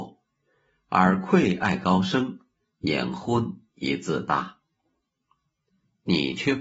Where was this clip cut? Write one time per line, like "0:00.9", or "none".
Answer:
0:05.7